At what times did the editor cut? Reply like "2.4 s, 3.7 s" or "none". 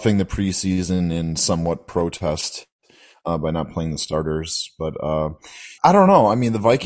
5.8 s